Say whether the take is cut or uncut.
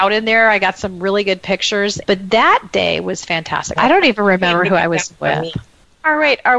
cut